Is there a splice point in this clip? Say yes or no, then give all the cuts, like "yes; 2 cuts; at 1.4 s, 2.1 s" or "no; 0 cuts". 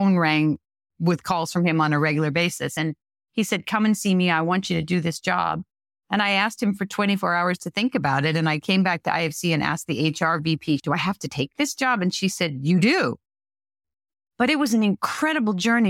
no; 0 cuts